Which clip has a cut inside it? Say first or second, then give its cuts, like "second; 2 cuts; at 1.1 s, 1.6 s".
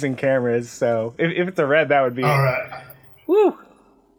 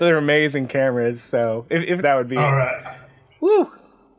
second; 1 cut; at 2.0 s